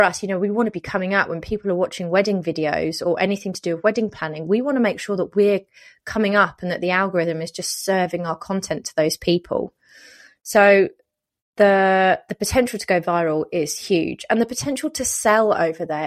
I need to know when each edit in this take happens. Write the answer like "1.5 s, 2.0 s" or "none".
none